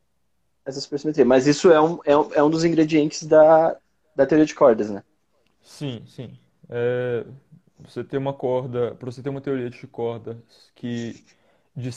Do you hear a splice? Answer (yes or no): no